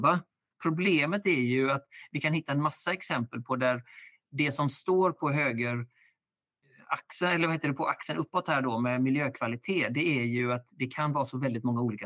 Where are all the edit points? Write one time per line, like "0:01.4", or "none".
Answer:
0:07.8